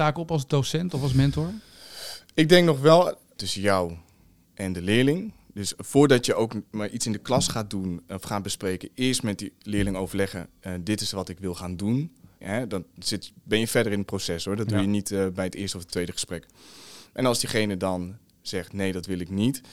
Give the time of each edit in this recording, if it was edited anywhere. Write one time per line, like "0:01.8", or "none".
0:03.4
0:12.4